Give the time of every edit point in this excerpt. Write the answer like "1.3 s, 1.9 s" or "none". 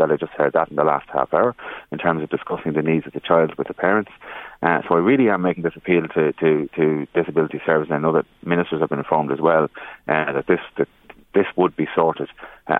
none